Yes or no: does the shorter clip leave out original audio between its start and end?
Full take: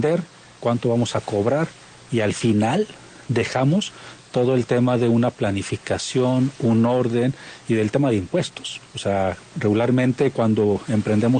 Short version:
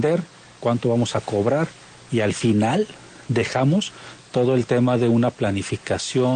no